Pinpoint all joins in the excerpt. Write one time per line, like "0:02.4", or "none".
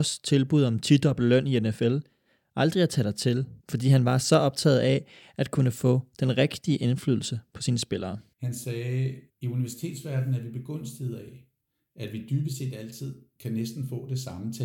none